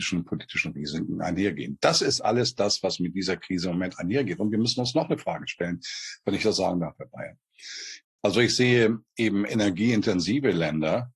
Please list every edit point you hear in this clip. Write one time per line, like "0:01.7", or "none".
0:08.0